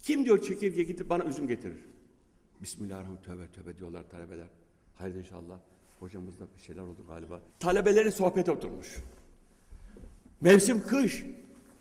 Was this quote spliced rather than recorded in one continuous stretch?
yes; 1 cut; at 7.5 s

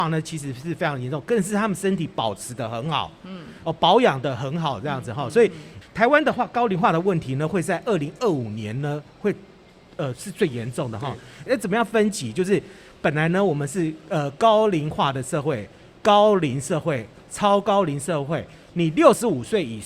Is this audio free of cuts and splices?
no; 2 cuts; at 5.8 s, 11.5 s

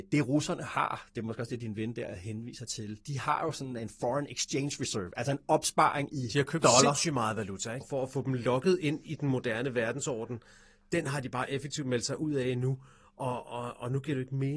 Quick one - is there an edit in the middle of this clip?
yes; 1 cut; at 7.8 s

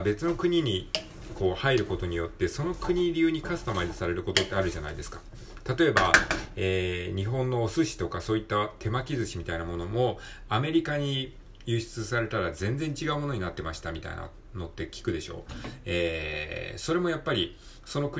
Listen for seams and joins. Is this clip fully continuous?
yes; 0 cuts

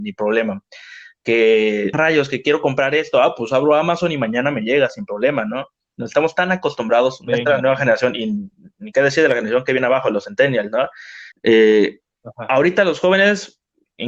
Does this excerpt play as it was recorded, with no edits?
no; 2 cuts; at 1.9 s, 11.3 s

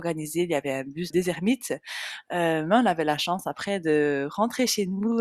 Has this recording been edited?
yes; 1 cut; at 1.1 s

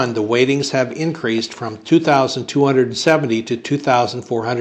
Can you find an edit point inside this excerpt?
no; 0 cuts

